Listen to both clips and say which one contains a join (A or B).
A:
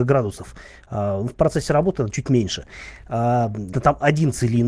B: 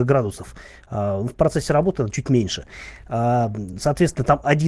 A